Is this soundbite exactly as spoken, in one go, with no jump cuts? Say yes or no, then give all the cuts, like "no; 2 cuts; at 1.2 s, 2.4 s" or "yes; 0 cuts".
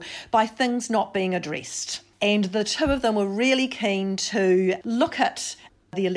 yes; 0 cuts